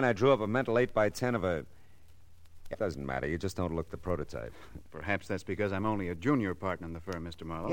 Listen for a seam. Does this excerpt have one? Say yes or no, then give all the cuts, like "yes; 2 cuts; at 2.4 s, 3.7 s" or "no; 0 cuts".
yes; 1 cut; at 2.7 s